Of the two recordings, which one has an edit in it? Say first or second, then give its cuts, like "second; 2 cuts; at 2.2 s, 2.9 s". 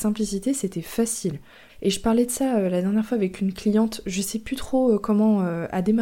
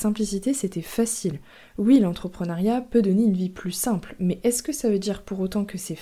first; 1 cut; at 1.7 s